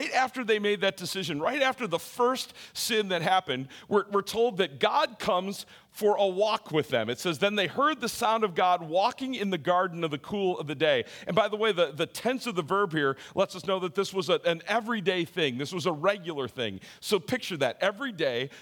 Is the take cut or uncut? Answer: uncut